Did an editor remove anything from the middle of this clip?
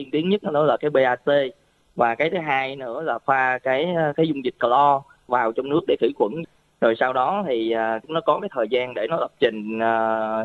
no; 0 cuts

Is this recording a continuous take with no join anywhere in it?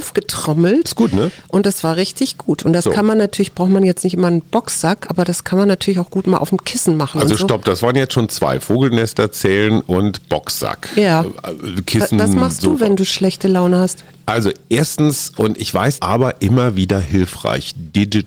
no; 1 cut; at 16.0 s

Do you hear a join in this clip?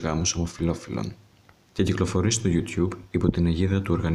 yes; 1 cut; at 1.6 s

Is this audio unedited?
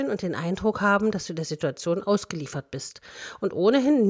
yes; 0 cuts

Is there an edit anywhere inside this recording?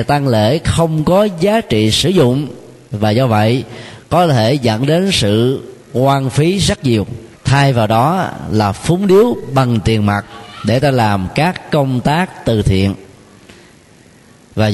yes; 1 cut; at 7.4 s

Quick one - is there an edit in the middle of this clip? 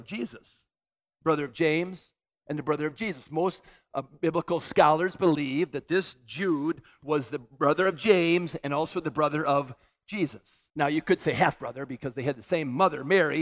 yes; 1 cut; at 10.7 s

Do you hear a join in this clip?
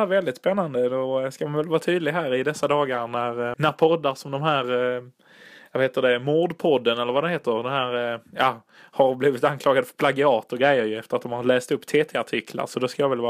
yes; 1 cut; at 3.5 s

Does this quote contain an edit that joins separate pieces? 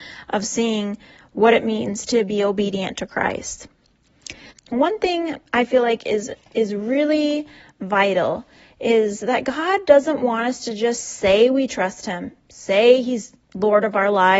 yes; 1 cut; at 4.5 s

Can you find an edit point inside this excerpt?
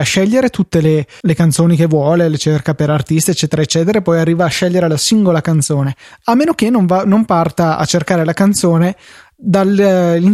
yes; 1 cut; at 1.2 s

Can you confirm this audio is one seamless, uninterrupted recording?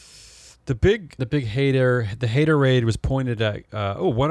no; 1 cut; at 1.2 s

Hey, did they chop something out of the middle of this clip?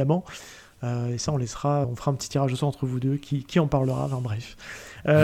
yes; 1 cut; at 1.8 s

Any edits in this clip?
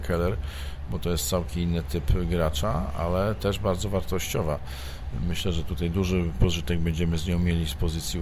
no; 0 cuts

